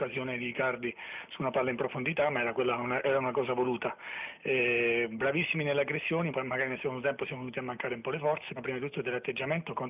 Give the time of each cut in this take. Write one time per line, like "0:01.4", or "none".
0:06.3
0:08.6